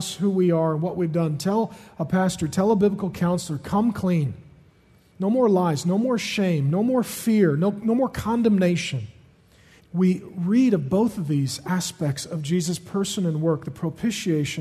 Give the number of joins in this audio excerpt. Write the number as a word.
two